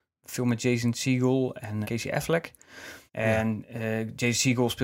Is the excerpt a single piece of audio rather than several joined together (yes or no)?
no